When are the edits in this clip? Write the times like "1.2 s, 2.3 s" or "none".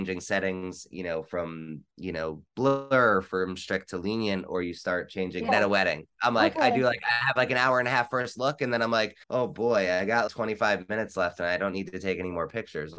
5.5 s, 9.2 s, 10.3 s

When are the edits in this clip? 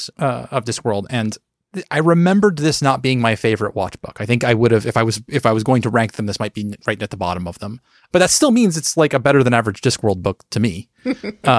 none

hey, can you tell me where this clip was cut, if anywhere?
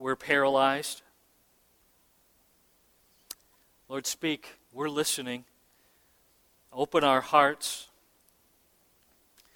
none

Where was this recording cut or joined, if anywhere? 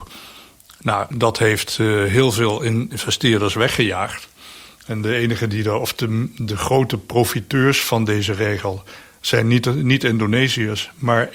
1.1 s

